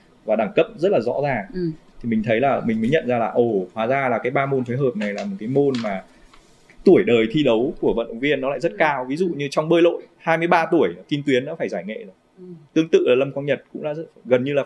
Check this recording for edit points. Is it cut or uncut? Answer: uncut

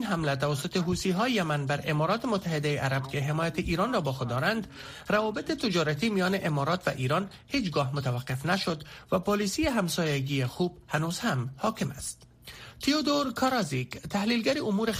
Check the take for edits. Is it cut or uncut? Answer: uncut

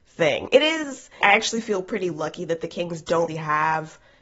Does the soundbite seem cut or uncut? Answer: cut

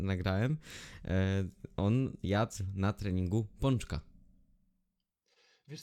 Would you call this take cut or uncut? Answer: uncut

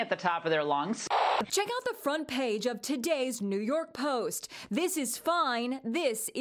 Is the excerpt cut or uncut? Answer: cut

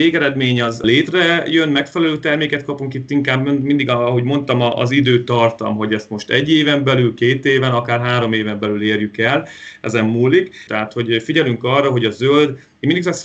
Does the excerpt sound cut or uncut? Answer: cut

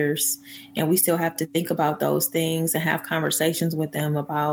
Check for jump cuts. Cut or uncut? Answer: uncut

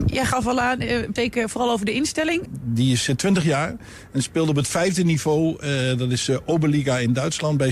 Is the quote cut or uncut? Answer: cut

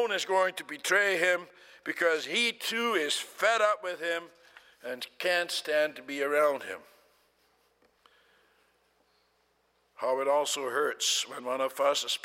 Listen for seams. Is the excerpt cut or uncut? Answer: uncut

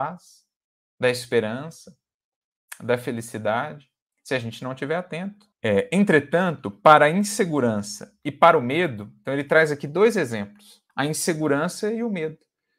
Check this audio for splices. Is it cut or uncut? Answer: cut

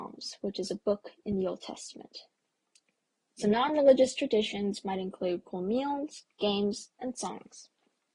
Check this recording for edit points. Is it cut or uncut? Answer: cut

